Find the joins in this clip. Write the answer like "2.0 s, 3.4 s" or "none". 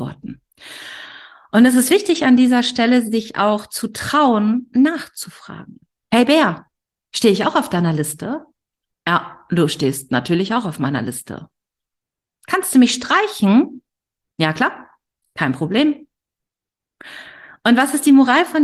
6.0 s